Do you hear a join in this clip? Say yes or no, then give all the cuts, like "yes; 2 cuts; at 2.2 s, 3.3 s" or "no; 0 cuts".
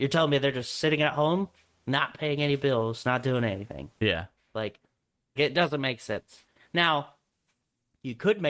yes; 1 cut; at 5.4 s